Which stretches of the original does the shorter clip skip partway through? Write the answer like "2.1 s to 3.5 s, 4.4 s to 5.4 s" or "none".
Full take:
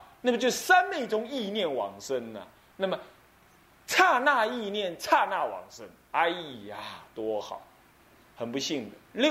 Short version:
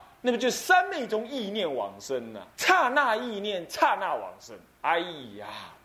2.5 s to 3.8 s

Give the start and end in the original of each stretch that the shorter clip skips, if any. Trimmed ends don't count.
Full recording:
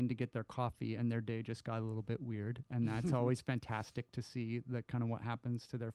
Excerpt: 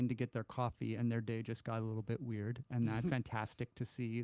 3.1 s to 3.4 s

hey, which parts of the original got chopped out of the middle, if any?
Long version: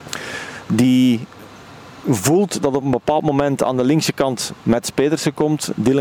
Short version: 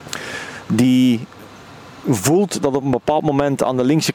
none

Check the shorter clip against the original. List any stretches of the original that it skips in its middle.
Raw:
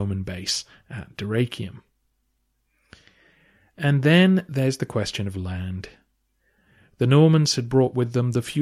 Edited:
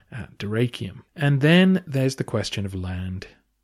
1.9 s to 3.7 s

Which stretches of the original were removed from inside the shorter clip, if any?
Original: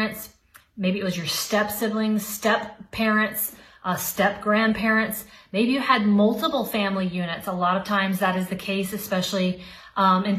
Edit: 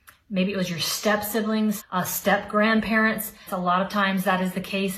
2.3 s to 3.7 s, 5.4 s to 7.4 s

